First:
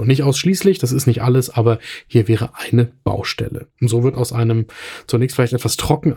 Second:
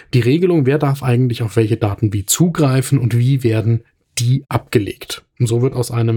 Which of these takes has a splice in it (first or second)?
first